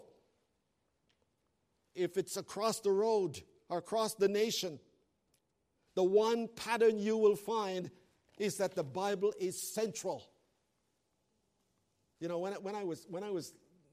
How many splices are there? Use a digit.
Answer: 1